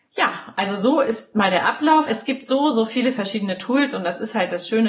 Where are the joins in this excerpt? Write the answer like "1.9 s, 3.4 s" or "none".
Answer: 2.1 s